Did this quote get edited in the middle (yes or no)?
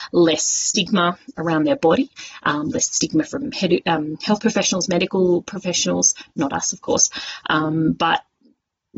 no